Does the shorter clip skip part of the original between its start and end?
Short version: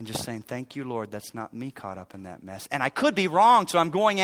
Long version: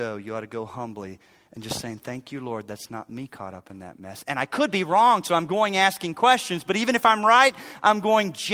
no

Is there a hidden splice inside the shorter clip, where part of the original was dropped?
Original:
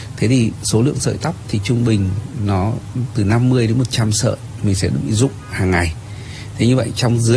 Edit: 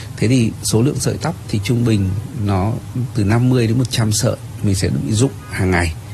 no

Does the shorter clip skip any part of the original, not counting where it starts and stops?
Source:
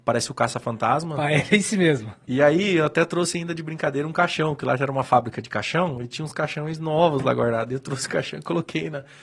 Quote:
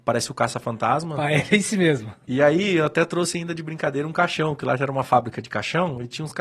no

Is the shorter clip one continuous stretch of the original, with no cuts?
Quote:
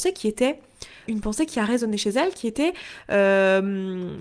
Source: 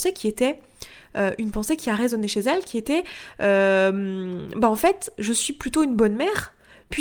no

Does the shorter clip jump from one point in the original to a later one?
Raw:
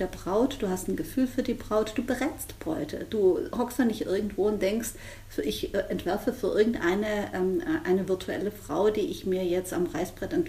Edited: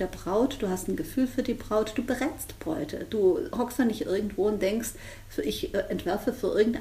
no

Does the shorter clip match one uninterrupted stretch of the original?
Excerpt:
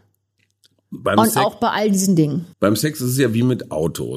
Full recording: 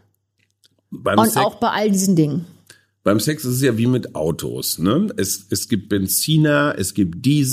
no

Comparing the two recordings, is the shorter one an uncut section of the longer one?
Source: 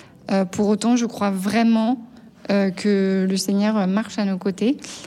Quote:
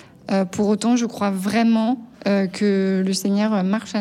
no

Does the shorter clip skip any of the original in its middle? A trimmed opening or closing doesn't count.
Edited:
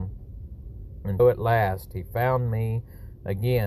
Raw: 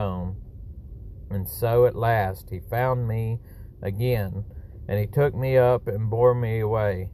yes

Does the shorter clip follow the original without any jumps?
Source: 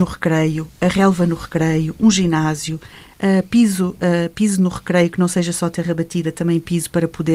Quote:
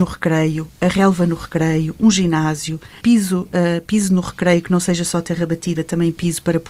no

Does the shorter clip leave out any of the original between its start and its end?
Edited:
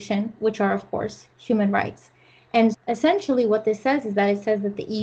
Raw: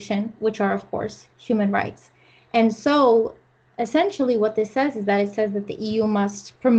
yes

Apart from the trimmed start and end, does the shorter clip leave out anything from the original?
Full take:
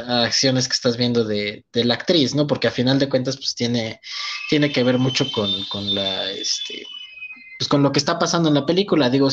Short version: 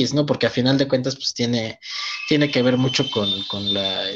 no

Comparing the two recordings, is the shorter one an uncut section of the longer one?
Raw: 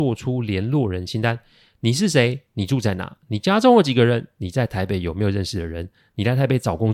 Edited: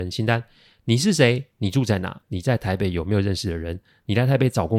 no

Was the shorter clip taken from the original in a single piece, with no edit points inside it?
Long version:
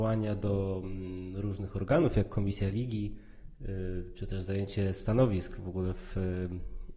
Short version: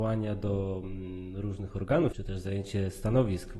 no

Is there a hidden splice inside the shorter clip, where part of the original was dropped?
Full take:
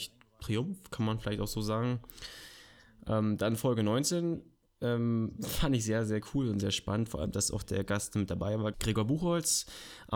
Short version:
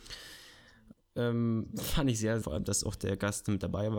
yes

